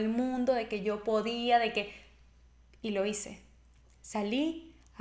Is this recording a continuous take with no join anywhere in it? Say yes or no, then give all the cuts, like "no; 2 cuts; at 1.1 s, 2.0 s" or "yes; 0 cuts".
yes; 0 cuts